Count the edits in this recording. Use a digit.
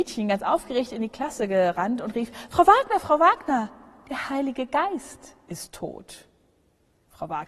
0